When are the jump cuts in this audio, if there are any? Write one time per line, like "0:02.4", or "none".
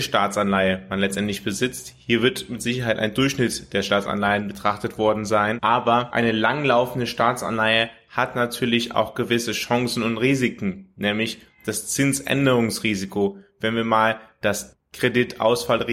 none